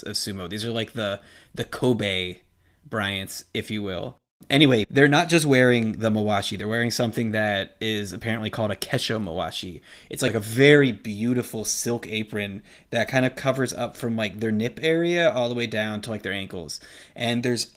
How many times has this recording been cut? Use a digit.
0